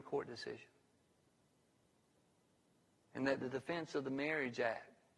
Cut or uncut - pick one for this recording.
uncut